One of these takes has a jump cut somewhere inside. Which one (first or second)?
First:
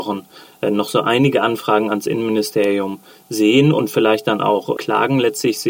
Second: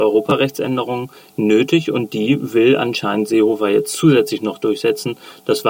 first